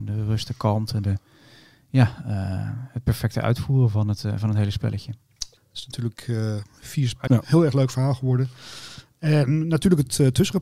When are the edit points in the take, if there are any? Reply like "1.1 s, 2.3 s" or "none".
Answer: 5.6 s, 7.3 s